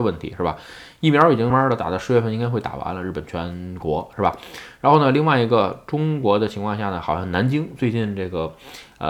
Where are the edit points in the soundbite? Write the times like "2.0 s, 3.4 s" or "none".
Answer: 1.5 s